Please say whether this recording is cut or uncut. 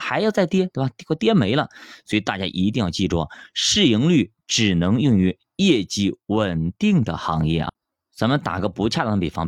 uncut